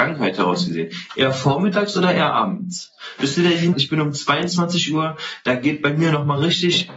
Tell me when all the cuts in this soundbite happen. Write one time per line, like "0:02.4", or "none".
0:03.7